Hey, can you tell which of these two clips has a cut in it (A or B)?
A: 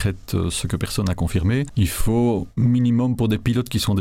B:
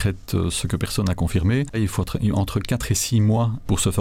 B